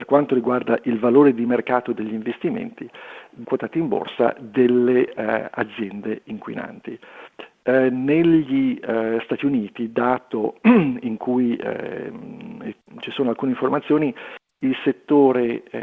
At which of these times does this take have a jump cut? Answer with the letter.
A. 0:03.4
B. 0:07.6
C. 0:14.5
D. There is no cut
A